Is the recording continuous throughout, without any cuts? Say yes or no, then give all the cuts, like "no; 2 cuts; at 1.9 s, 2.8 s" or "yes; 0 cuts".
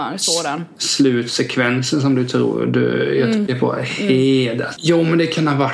no; 2 cuts; at 3.5 s, 4.8 s